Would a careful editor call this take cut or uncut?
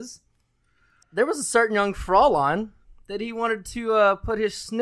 cut